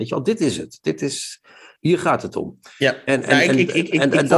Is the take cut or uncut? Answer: uncut